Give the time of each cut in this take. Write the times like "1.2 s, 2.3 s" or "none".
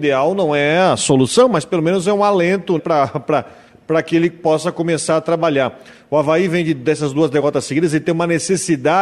2.8 s